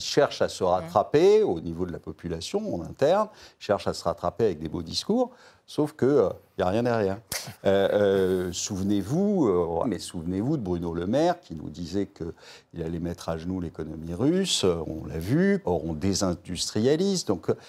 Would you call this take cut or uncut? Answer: cut